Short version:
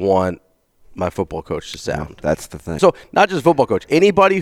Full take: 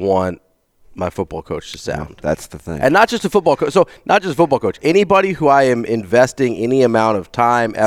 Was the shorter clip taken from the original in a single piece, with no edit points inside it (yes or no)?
no